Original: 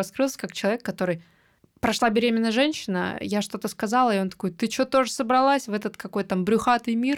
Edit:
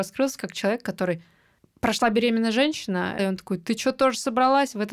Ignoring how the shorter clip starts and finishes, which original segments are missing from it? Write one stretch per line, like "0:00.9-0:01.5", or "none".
0:03.2-0:04.1